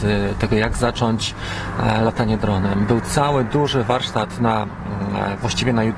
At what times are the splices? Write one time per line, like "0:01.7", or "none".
none